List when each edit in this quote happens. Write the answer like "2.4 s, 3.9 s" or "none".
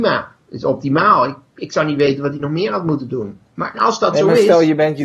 3.7 s